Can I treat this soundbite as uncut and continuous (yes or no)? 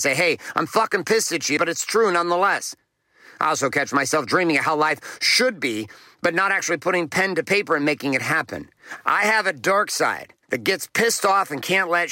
no